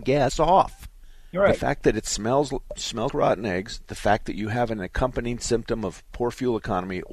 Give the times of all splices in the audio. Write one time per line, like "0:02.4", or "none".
0:01.3
0:03.1